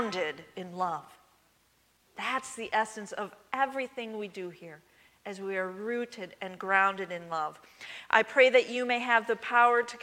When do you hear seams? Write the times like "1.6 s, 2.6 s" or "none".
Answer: none